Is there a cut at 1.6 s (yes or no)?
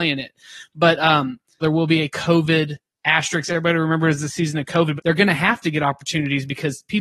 yes